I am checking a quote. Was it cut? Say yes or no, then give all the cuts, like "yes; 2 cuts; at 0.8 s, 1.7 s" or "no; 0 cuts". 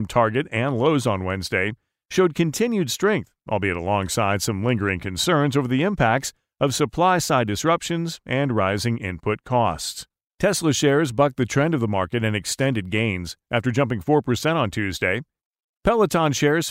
yes; 1 cut; at 10.3 s